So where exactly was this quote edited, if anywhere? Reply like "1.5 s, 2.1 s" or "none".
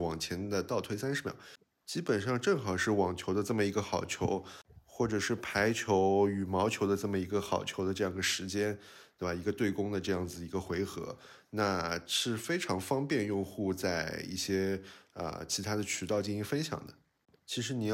none